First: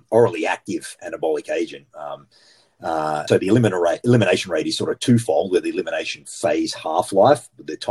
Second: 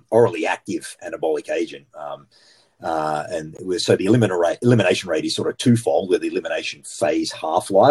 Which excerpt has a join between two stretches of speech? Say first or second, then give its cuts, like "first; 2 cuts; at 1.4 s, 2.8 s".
first; 1 cut; at 3.3 s